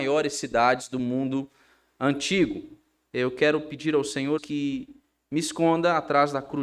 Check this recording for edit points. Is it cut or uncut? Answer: cut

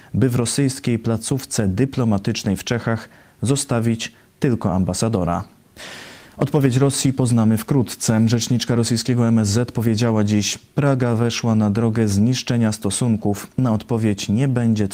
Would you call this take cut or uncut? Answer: uncut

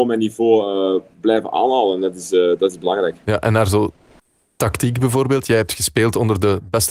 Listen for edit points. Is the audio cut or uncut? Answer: uncut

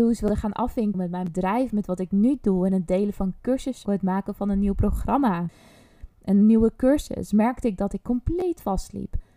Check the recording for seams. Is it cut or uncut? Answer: cut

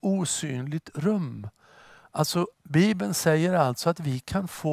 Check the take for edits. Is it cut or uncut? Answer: cut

